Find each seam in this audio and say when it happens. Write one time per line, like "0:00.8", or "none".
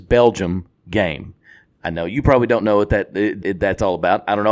0:03.4